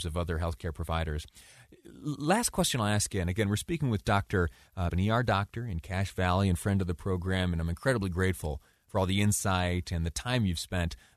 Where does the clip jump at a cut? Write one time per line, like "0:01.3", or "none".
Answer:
0:04.9